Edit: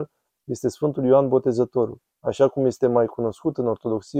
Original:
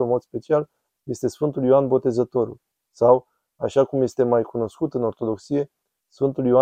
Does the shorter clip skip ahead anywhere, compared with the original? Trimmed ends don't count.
yes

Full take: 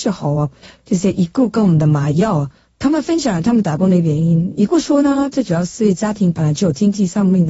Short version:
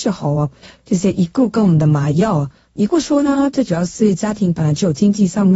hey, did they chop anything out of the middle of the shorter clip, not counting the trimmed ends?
yes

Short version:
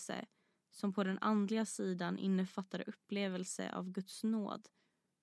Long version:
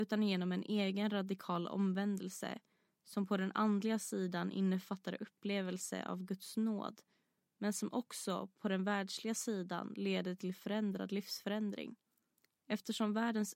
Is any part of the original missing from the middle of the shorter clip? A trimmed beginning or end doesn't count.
no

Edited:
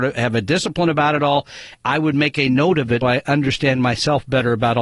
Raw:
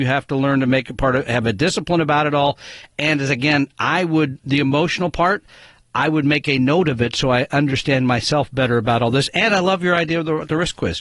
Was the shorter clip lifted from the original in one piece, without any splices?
no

